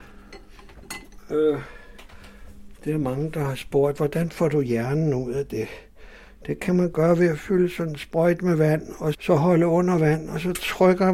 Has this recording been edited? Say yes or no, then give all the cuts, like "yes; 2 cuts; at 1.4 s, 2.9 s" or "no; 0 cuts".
yes; 1 cut; at 9.1 s